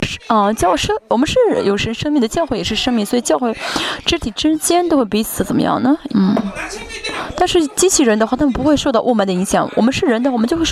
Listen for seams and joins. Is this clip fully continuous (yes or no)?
no